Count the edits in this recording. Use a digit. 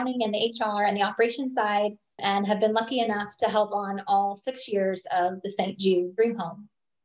1